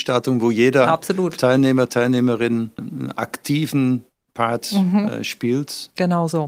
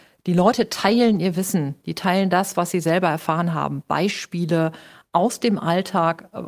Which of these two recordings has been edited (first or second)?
first